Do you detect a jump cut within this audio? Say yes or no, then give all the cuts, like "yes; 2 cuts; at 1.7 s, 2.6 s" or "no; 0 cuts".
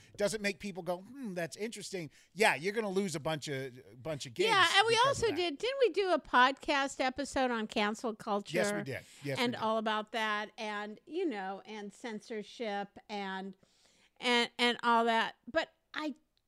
no; 0 cuts